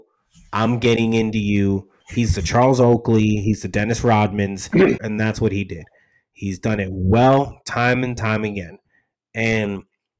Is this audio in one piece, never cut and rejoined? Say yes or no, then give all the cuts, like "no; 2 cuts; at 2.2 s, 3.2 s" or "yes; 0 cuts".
no; 1 cut; at 5.0 s